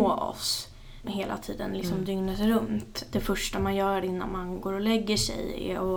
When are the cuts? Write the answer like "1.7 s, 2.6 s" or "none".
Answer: 1.0 s

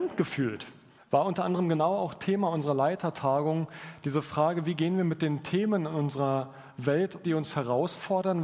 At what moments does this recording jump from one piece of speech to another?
1.0 s, 7.2 s

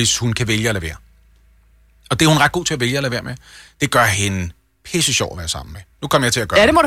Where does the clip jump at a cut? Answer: 5.9 s

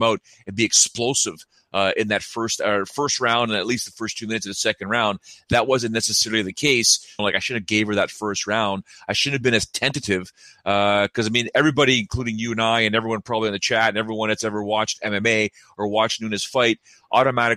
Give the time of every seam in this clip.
7.2 s

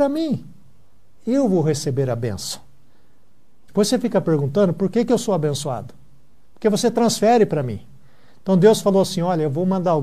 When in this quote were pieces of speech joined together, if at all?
3.7 s

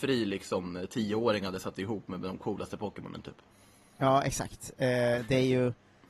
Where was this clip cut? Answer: none

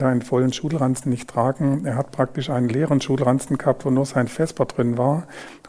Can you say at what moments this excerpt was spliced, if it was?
none

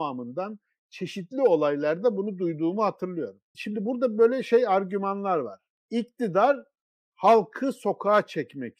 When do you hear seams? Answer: 3.5 s

